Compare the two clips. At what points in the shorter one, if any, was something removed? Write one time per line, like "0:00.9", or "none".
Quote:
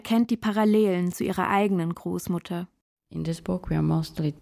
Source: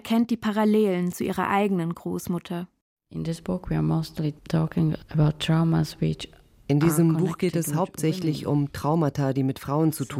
none